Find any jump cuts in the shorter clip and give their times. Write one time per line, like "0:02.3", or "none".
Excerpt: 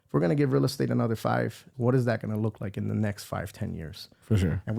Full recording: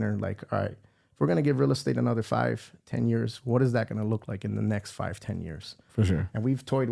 0:01.7